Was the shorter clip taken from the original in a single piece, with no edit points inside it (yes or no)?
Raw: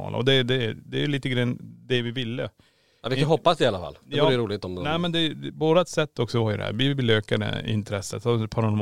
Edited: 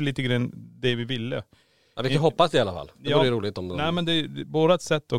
yes